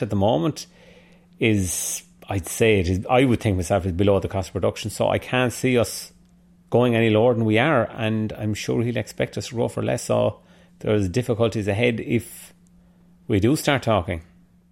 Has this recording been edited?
no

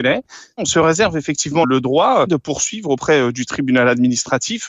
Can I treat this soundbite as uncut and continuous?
no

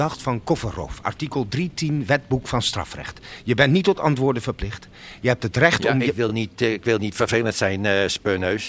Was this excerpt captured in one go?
yes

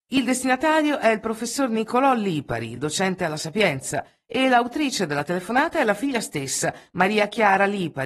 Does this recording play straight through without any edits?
yes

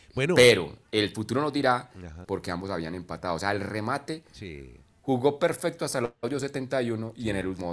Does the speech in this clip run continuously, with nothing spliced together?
no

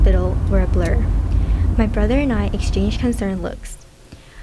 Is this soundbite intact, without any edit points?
no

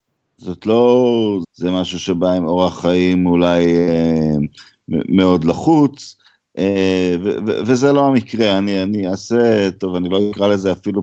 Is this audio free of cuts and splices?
no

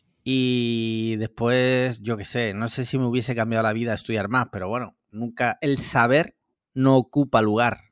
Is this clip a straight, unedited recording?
no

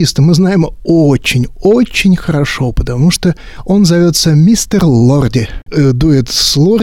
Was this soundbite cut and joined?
yes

